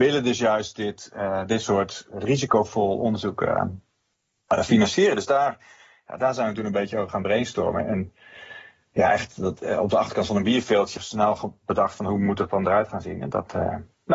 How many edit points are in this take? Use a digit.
1